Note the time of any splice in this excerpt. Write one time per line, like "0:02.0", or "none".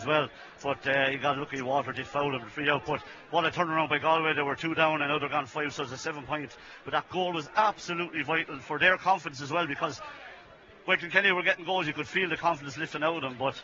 none